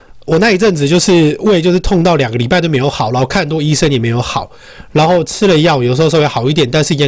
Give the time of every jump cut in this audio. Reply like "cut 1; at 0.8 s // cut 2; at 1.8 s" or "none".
none